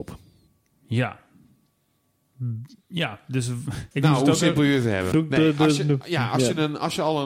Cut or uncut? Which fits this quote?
cut